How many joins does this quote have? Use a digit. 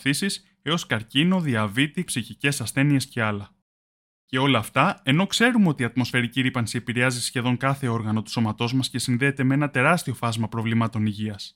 2